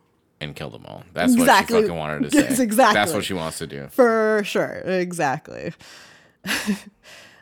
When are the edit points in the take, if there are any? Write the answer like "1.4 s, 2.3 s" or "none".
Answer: none